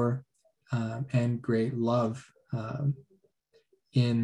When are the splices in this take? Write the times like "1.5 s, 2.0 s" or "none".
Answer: none